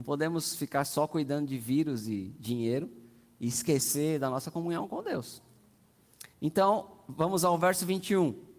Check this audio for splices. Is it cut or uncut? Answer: cut